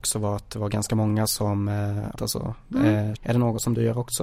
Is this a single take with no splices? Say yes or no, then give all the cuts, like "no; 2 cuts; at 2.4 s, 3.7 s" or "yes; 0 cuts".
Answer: no; 2 cuts; at 2.1 s, 3.1 s